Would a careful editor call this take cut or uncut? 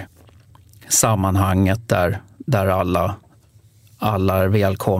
uncut